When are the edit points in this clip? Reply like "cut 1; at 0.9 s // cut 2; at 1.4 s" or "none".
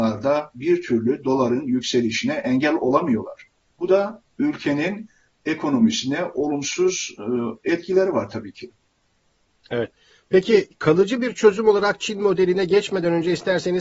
none